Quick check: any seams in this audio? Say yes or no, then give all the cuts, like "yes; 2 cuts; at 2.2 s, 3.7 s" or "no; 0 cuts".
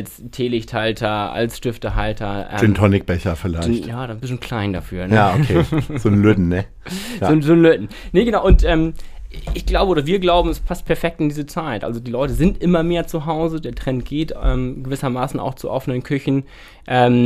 no; 0 cuts